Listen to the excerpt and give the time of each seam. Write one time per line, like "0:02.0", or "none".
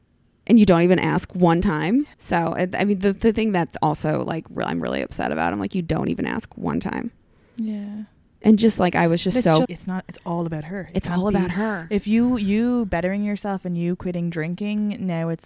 0:02.1
0:09.6